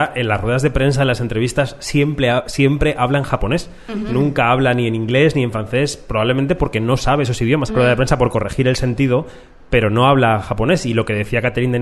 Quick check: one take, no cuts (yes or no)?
no